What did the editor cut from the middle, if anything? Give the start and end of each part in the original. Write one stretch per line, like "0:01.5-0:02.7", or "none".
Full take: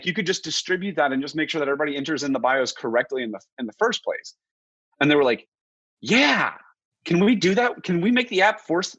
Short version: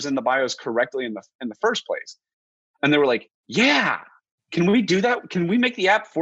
0:05.5-0:05.9

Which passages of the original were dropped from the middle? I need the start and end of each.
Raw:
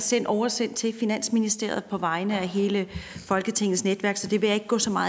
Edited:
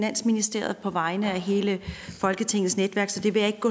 none

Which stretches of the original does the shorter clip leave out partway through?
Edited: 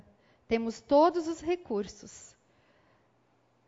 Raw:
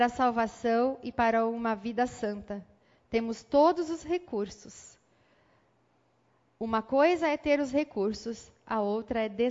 none

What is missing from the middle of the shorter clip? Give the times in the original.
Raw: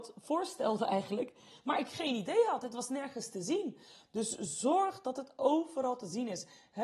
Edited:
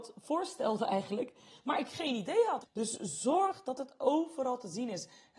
0:02.6-0:04.0

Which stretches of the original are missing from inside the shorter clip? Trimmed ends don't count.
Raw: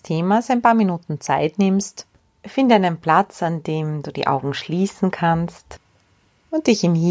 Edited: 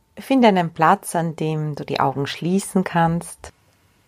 none

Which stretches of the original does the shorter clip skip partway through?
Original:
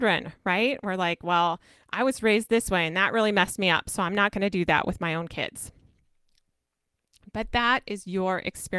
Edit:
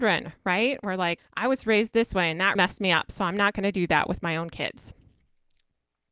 0:01.2-0:01.7
0:03.1-0:03.3

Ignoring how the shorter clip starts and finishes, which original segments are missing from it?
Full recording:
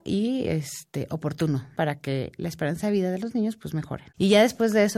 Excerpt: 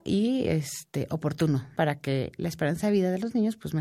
none

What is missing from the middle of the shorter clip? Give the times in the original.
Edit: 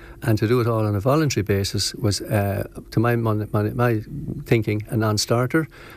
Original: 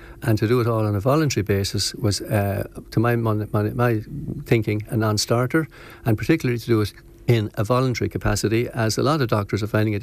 none

